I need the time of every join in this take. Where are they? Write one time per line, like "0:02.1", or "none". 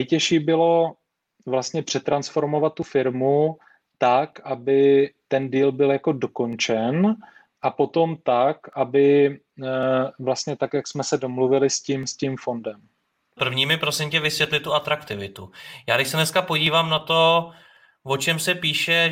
0:13.4